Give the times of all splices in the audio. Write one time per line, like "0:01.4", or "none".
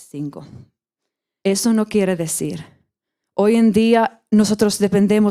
0:01.4
0:03.2